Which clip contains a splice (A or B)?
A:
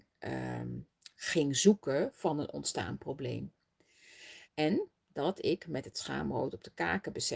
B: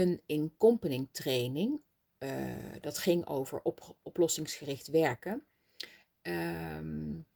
A